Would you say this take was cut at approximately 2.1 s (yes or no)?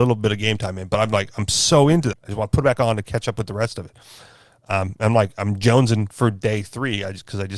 yes